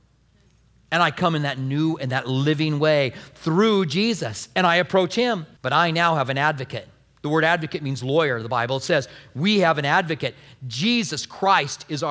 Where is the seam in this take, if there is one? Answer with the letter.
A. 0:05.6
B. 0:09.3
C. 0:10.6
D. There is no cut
A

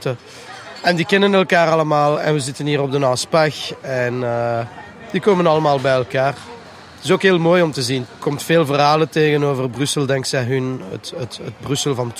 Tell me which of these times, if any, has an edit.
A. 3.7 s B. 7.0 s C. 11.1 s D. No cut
D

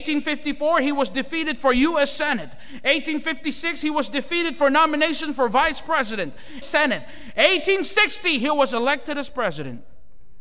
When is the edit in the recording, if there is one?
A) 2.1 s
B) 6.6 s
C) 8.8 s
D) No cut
B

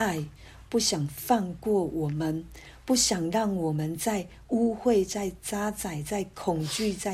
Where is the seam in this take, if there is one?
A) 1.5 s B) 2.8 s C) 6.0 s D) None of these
D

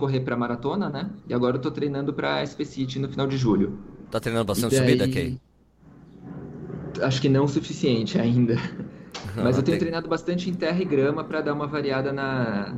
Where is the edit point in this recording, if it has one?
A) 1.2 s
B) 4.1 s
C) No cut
B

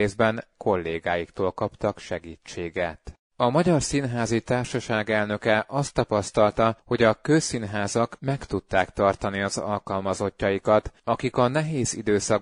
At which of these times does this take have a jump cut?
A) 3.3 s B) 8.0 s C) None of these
A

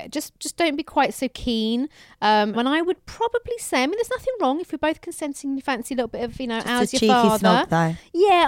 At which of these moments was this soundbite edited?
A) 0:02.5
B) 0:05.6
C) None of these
A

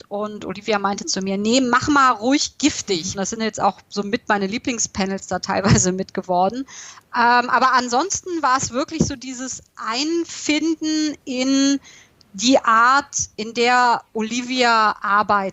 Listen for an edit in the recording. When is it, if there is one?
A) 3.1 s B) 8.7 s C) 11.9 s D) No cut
A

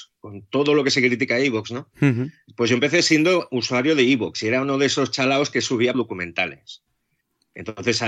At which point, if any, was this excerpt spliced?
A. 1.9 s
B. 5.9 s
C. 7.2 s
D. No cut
B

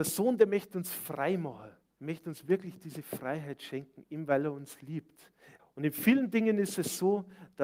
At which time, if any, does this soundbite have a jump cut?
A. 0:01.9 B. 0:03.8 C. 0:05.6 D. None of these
C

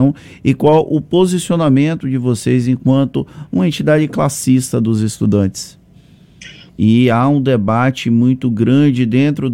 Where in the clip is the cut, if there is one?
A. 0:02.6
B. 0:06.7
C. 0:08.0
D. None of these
B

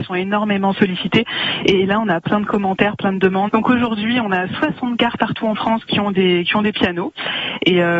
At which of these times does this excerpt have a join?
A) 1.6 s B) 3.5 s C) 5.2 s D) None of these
B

